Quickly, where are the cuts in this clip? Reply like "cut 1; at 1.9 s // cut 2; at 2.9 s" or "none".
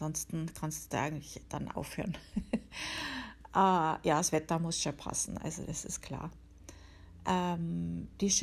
none